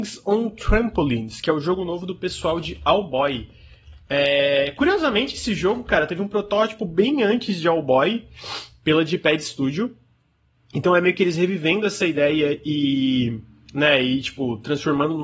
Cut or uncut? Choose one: uncut